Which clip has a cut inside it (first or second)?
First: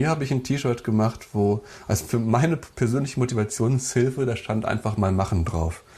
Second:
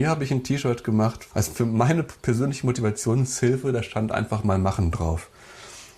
second